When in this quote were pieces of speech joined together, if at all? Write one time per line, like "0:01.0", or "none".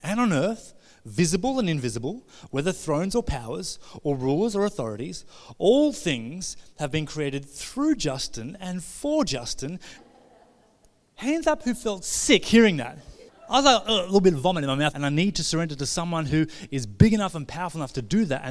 0:10.0
0:13.3
0:14.9